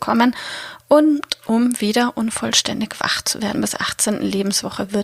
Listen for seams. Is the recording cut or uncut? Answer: cut